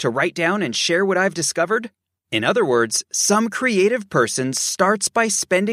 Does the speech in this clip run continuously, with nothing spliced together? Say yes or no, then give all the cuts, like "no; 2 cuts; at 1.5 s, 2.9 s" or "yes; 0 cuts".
yes; 0 cuts